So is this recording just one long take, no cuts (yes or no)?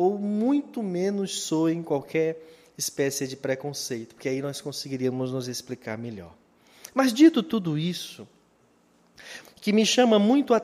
no